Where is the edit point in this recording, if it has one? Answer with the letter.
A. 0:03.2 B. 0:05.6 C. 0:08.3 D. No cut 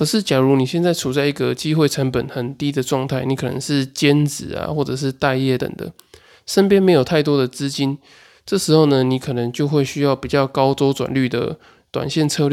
B